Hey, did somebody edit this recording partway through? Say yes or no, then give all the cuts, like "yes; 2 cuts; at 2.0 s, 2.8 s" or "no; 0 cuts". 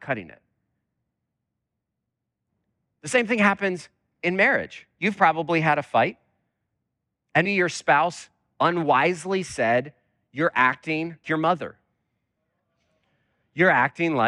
yes; 2 cuts; at 7.5 s, 11.2 s